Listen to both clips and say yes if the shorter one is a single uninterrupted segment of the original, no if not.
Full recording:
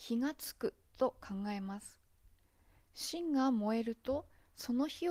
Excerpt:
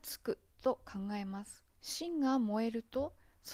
no